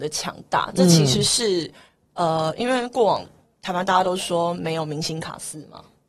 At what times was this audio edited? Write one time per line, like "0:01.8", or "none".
none